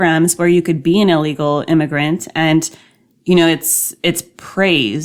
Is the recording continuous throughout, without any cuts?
yes; 0 cuts

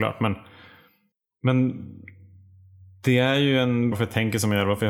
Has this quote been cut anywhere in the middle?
yes; 1 cut; at 3.9 s

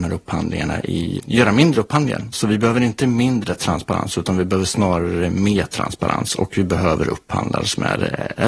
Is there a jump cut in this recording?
yes; 2 cuts; at 1.2 s, 2.3 s

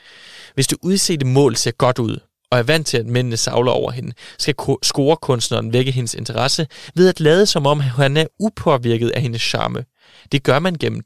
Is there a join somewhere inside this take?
no; 0 cuts

